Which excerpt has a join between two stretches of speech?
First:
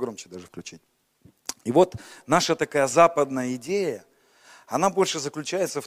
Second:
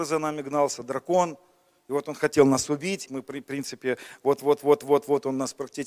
second; 1 cut; at 3.1 s

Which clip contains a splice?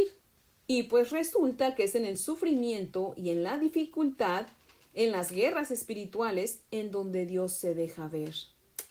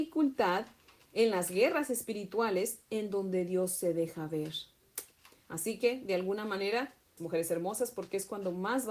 second; 1 cut; at 7.2 s

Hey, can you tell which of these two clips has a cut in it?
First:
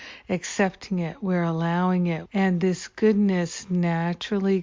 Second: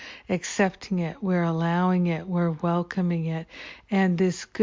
first; 1 cut; at 2.3 s

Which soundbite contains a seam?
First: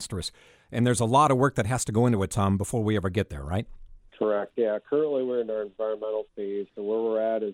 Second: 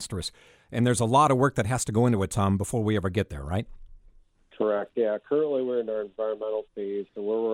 first; 1 cut; at 4.1 s

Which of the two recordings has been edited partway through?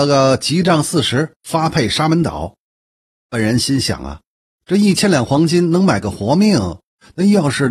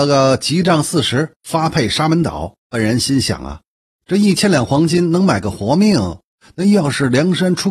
second; 1 cut; at 2.6 s

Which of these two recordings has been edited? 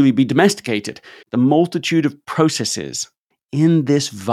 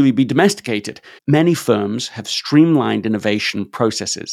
second; 1 cut; at 1.2 s

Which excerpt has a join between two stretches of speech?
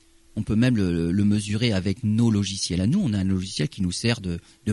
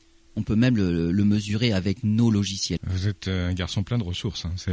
second; 1 cut; at 2.8 s

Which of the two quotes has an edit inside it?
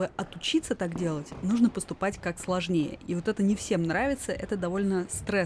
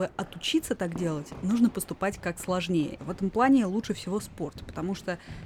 second; 1 cut; at 3.0 s

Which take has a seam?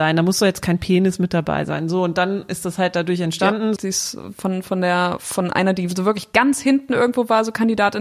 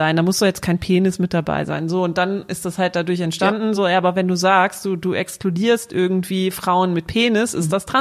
first; 1 cut; at 3.8 s

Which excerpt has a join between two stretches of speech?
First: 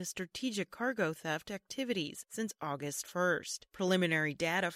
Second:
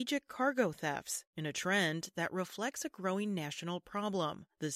first; 1 cut; at 3.7 s

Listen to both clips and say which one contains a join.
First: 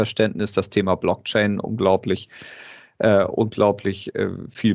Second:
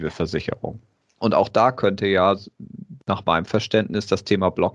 second; 1 cut; at 1.0 s

